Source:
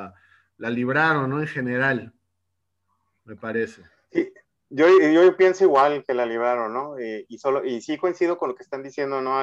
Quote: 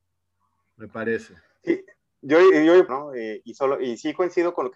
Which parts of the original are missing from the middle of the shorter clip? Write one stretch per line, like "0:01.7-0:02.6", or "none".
0:05.4-0:06.7